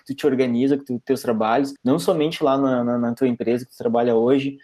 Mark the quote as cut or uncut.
uncut